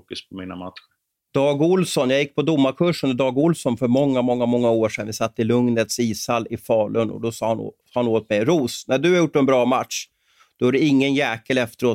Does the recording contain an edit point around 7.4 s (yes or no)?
no